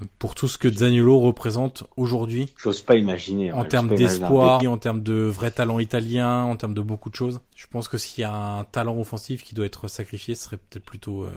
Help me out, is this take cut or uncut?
cut